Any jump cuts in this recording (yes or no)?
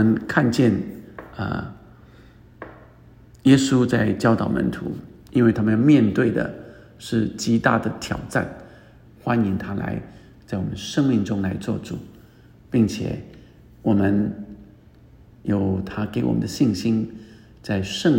yes